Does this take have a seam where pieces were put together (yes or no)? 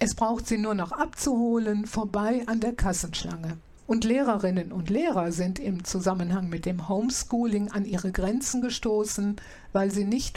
yes